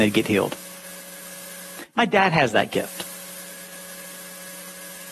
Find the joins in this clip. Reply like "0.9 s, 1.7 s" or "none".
none